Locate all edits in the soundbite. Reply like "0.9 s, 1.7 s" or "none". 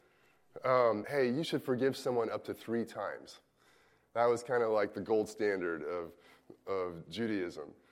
1.0 s